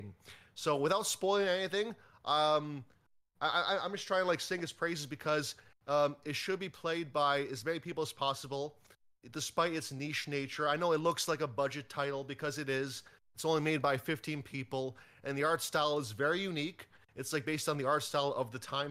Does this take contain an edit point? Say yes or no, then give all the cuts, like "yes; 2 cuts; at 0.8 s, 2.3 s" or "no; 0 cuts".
no; 0 cuts